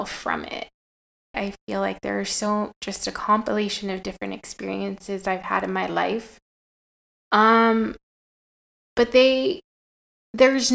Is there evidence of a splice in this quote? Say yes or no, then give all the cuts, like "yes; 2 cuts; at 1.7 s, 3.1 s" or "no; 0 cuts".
yes; 1 cut; at 1.3 s